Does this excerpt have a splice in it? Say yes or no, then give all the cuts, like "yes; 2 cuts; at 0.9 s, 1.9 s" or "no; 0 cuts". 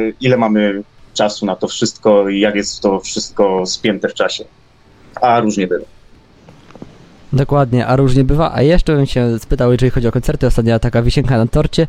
no; 0 cuts